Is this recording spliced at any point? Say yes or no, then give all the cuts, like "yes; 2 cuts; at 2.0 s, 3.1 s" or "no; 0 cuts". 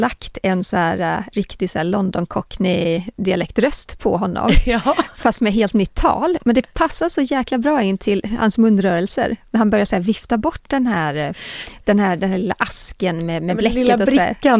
no; 0 cuts